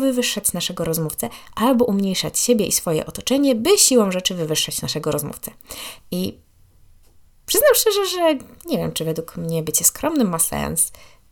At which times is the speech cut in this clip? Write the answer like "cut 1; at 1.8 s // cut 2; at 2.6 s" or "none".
cut 1; at 6.0 s